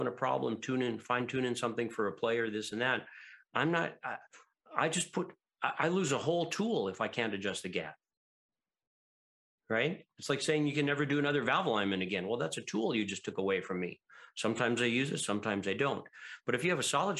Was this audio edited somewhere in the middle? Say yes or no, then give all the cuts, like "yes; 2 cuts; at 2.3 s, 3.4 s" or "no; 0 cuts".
no; 0 cuts